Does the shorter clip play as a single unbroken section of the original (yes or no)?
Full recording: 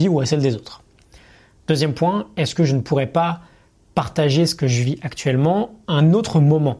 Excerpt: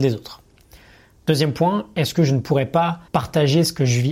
no